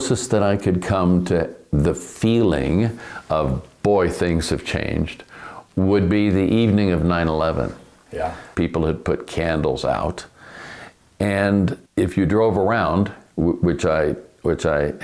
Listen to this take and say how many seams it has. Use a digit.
2